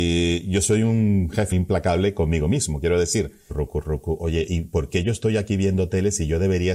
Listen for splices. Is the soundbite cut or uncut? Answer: cut